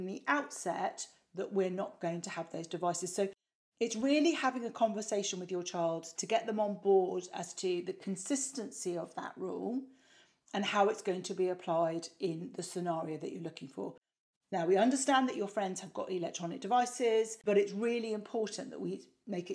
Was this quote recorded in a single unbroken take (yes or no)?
no